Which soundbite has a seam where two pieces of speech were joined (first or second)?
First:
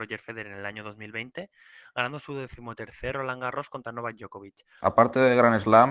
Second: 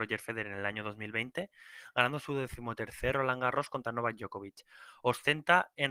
first